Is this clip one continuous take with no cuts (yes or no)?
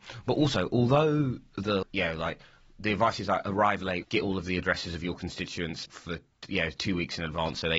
no